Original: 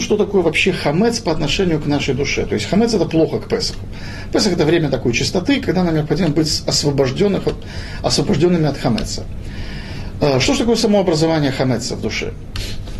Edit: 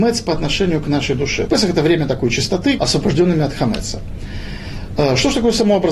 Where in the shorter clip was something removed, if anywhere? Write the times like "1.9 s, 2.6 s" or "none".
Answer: 1.5 s, 2.8 s